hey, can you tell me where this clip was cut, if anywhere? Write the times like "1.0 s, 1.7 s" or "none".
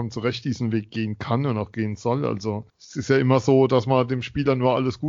2.7 s